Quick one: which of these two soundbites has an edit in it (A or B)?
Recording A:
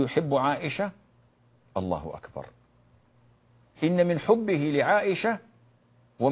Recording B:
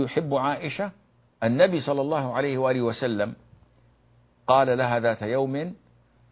B